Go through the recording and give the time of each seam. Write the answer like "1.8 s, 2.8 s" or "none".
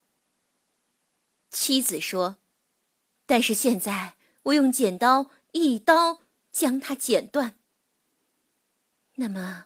3.1 s